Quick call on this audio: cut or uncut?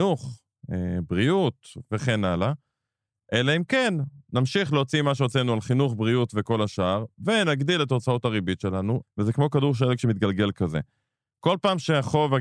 cut